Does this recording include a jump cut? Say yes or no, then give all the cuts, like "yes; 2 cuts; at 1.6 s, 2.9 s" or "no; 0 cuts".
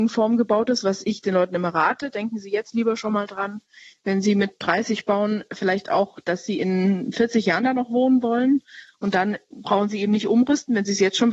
no; 0 cuts